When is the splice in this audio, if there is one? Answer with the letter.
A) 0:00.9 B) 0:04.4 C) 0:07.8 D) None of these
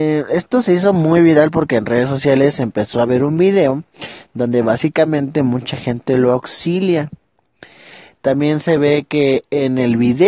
D